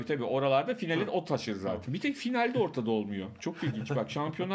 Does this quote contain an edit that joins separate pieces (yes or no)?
yes